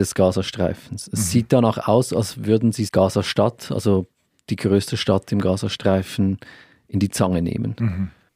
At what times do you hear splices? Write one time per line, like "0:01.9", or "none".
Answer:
0:02.9